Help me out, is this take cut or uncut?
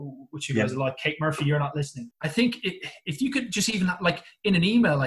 cut